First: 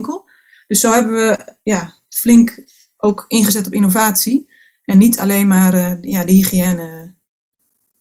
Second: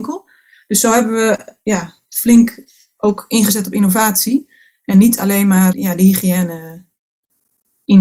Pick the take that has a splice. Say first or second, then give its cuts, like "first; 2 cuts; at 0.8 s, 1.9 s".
second; 1 cut; at 5.7 s